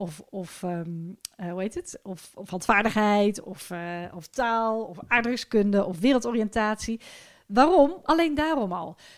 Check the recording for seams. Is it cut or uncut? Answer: cut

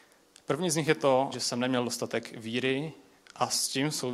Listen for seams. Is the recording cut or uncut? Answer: cut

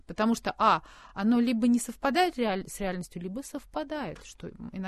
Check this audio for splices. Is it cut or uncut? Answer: uncut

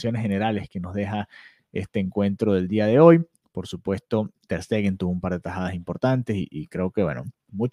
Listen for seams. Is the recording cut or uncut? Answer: cut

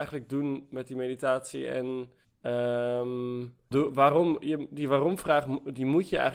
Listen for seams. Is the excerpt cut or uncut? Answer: cut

